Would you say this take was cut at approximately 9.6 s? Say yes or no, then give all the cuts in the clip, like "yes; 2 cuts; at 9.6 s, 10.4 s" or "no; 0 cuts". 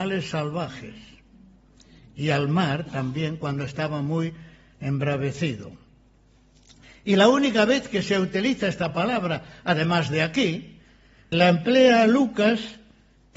no; 1 cut; at 11.3 s